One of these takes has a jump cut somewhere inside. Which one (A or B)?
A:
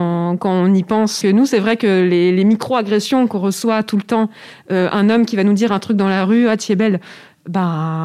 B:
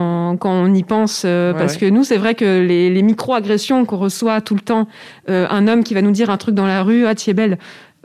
A